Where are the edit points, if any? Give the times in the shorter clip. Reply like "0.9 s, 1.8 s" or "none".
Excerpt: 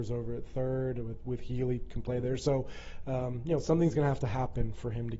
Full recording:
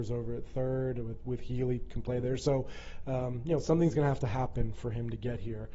none